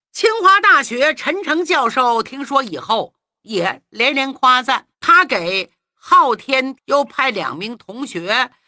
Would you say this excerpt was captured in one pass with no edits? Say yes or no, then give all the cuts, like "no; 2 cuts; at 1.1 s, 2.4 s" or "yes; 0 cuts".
no; 2 cuts; at 4.9 s, 6.7 s